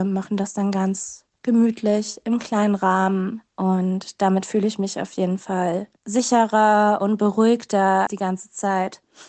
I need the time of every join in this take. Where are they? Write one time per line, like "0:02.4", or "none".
0:06.0
0:08.1